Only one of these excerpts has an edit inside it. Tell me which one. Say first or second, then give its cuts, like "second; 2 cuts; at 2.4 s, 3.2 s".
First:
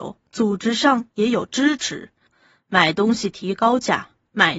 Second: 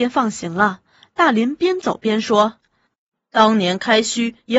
first; 1 cut; at 2.3 s